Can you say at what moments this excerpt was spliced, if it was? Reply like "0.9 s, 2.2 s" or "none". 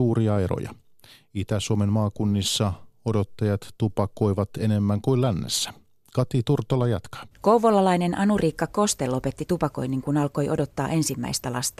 7.3 s